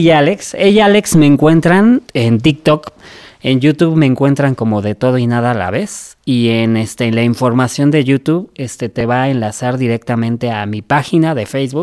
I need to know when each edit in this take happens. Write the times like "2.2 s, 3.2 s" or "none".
none